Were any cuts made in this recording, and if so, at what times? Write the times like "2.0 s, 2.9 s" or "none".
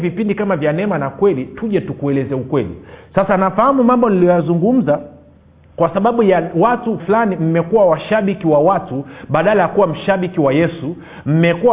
7.0 s